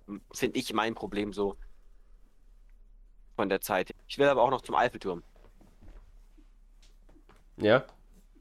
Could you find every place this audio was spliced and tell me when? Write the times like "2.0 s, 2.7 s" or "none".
3.9 s